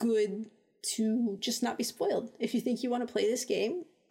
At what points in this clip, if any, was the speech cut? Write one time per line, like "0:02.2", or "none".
none